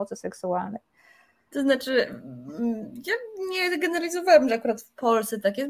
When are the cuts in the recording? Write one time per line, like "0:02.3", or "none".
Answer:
0:01.5